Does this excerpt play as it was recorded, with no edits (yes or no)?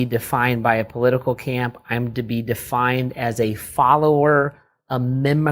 yes